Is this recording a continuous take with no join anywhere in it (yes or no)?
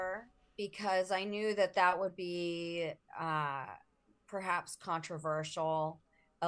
yes